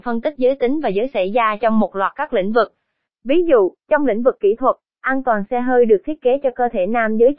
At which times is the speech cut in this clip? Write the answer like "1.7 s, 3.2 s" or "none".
none